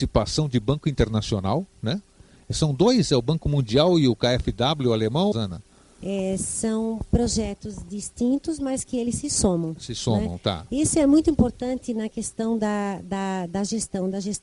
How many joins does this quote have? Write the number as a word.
one